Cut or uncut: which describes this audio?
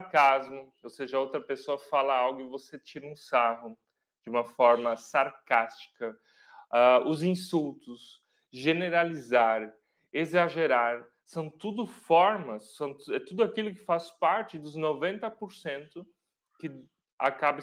uncut